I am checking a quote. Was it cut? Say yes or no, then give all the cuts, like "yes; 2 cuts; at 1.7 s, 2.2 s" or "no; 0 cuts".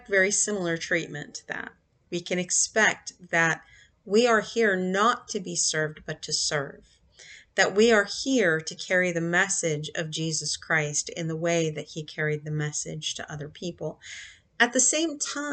no; 0 cuts